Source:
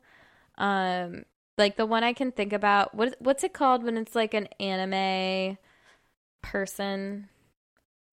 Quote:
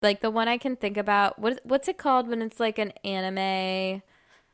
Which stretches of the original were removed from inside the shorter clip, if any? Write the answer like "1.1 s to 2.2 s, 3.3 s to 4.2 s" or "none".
none